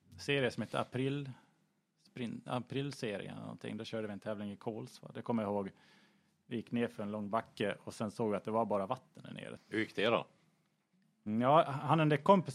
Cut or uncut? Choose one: cut